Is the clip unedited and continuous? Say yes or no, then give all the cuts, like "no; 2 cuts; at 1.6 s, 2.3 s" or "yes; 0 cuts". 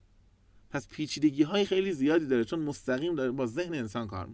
no; 1 cut; at 1.7 s